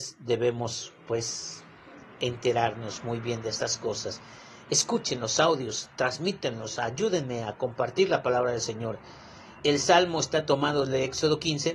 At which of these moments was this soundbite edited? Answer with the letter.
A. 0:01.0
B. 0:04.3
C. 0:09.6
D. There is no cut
C